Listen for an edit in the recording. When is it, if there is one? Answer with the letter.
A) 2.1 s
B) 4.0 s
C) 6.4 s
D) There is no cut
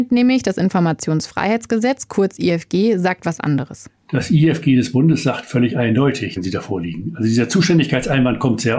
C